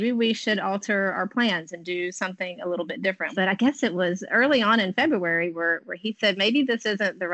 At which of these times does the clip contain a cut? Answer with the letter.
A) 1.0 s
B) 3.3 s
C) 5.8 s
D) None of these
B